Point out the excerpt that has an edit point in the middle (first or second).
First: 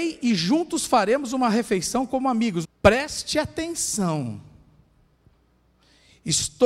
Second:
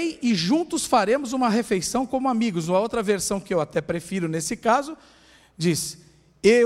first